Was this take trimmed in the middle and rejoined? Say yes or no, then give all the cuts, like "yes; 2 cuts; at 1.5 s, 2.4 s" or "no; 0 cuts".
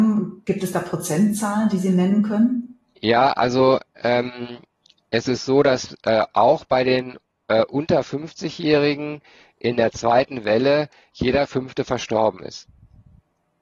no; 0 cuts